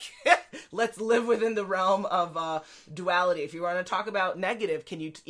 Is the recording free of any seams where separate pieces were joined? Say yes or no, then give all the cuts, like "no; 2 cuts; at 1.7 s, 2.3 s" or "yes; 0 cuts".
yes; 0 cuts